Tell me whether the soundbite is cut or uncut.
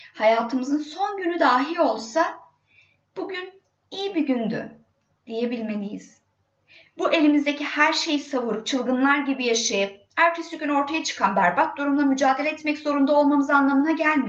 uncut